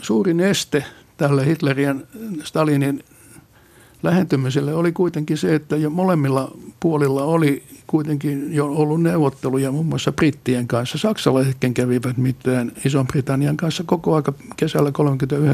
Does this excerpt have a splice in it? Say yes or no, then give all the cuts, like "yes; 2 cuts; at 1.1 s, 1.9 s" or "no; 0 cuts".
no; 0 cuts